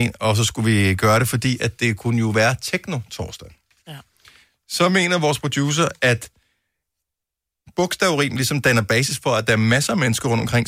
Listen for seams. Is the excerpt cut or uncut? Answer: uncut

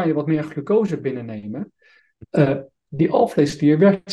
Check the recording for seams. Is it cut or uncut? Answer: cut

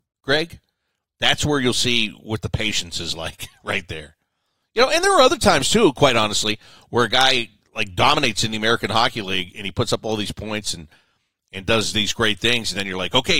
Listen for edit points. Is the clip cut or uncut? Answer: uncut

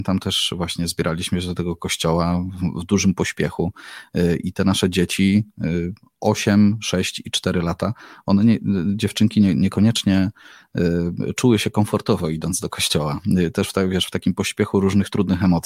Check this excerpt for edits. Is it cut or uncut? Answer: uncut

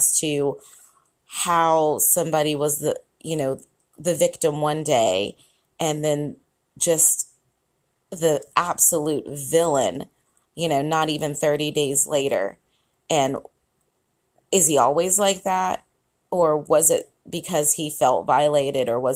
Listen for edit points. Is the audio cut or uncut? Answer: uncut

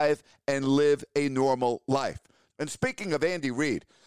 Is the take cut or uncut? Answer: cut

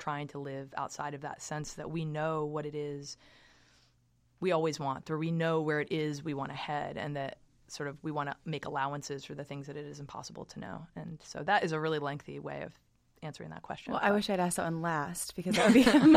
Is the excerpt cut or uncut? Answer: uncut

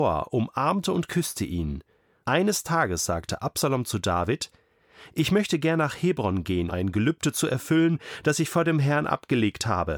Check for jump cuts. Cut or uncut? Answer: cut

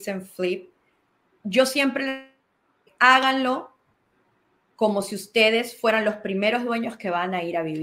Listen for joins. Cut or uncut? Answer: uncut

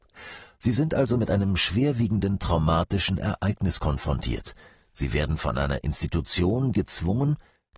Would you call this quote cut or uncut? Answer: cut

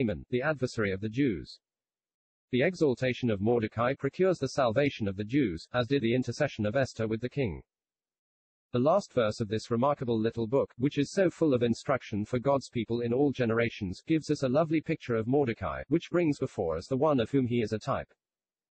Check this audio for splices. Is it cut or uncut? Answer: cut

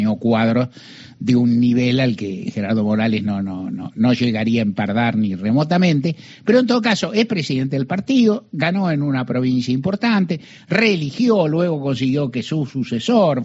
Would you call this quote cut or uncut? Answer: uncut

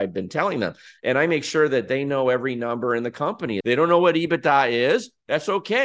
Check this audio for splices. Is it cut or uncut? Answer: cut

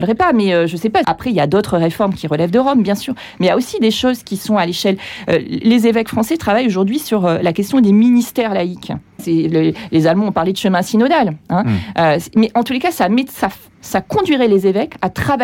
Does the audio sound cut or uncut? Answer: cut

